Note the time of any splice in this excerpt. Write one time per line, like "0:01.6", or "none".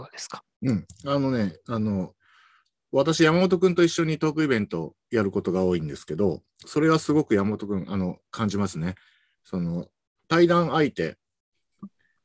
0:10.2